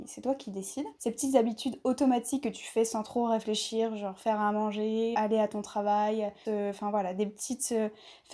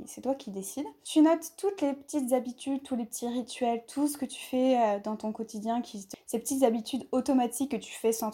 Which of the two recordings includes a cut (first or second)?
first